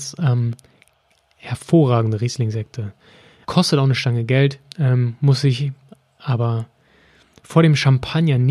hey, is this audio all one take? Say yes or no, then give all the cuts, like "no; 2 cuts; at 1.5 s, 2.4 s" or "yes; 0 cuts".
no; 1 cut; at 3.4 s